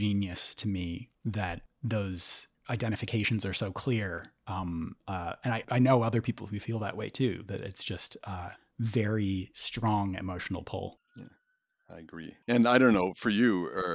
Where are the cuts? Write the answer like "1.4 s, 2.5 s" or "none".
5.6 s